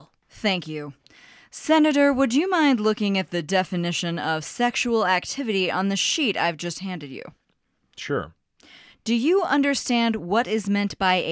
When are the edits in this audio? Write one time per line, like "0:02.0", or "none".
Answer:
none